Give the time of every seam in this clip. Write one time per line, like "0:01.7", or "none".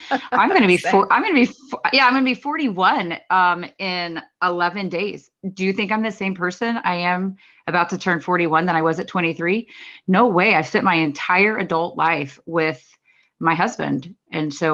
none